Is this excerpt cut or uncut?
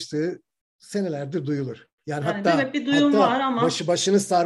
uncut